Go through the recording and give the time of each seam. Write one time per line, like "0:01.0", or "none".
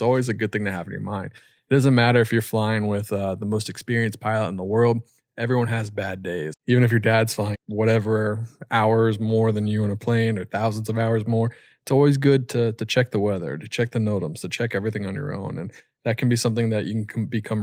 0:06.5
0:07.5